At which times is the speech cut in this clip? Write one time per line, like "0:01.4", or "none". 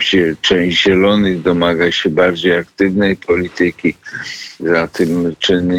0:04.6